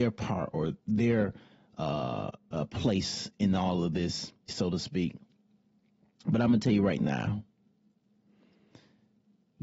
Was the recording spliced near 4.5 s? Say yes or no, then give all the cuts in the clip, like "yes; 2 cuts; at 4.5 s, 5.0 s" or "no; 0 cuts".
yes; 2 cuts; at 3.3 s, 4.5 s